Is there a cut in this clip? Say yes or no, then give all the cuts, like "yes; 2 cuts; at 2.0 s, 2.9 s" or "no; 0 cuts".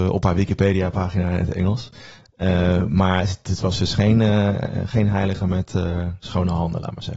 no; 0 cuts